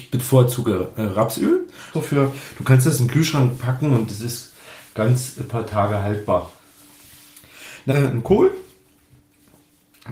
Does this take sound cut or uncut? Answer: cut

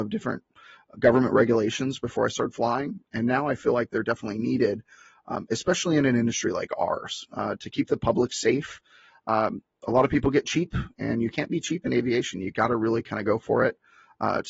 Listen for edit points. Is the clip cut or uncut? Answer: uncut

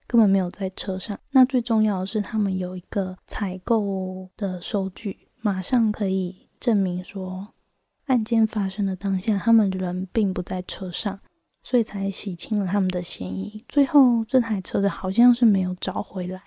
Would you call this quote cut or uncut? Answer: uncut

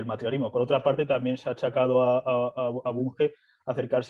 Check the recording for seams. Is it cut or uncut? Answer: uncut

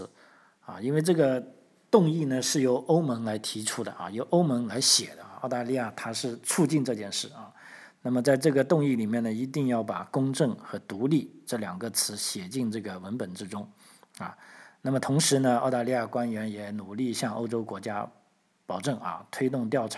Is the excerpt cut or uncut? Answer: cut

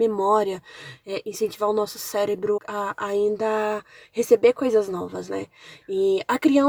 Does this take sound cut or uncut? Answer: cut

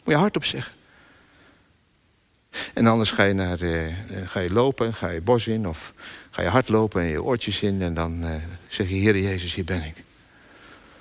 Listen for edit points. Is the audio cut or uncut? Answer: uncut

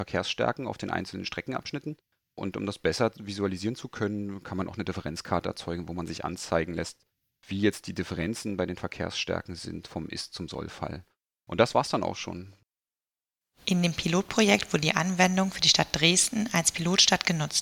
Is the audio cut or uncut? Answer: uncut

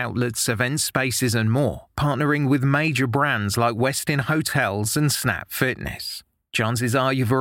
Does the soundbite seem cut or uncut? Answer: uncut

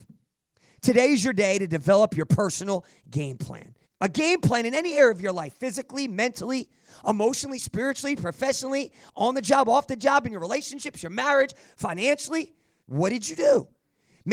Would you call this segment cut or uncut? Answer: cut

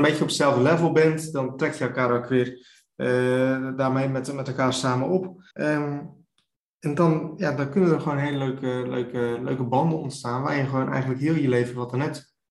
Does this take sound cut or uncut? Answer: cut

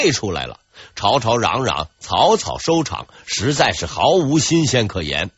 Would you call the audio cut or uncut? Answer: uncut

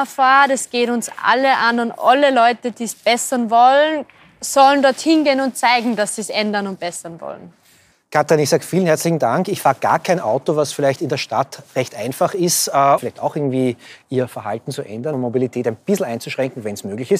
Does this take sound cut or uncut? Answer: cut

